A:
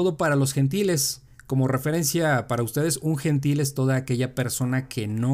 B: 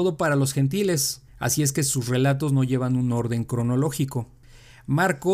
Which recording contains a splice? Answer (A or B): B